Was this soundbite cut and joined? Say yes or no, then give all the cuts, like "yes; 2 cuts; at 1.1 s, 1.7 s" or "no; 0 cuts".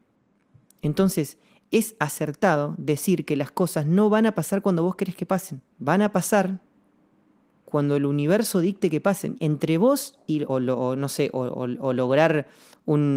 yes; 3 cuts; at 5.7 s, 9.3 s, 10.5 s